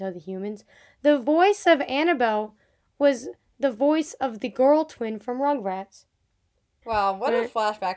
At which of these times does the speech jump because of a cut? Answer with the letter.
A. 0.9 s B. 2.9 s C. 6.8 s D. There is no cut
C